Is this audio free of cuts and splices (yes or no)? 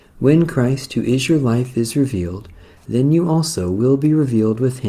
yes